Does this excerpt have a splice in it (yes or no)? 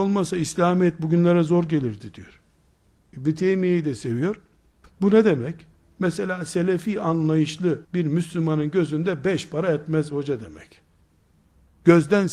yes